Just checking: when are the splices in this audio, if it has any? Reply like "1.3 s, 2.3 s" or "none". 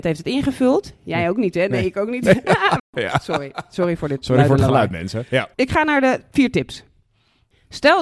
2.8 s

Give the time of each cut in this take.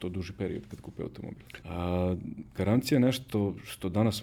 1.6 s

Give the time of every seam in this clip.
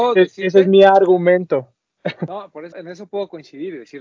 2.7 s

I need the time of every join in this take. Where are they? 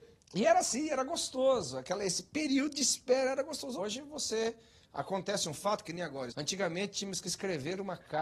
3.8 s, 6.3 s

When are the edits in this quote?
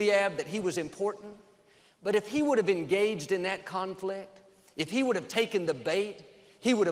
none

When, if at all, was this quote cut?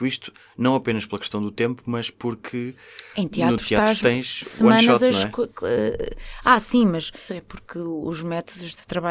7.3 s

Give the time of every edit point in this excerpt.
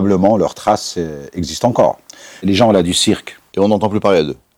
2.4 s, 3.5 s

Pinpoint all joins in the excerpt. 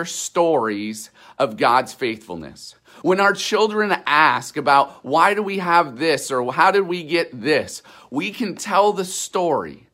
3.0 s

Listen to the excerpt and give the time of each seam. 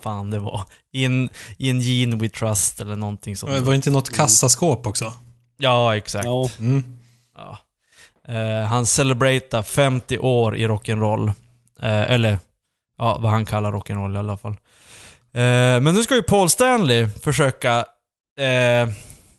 none

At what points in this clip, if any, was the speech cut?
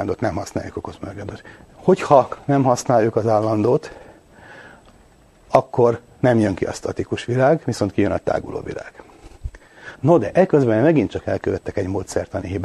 1.7 s, 10.0 s

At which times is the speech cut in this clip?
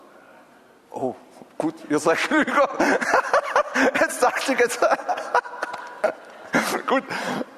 none

